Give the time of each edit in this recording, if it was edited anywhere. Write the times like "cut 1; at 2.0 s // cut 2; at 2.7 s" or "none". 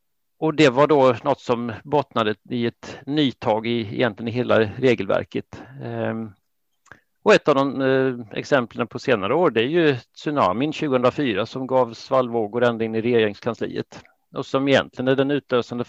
cut 1; at 8.9 s